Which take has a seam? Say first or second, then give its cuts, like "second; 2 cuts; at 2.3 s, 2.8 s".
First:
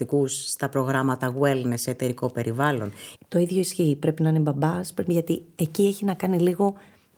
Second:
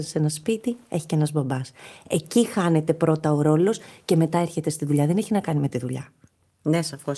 first; 1 cut; at 3.2 s